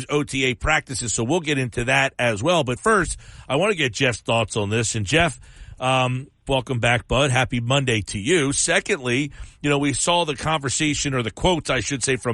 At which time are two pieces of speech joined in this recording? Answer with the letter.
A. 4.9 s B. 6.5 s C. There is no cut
B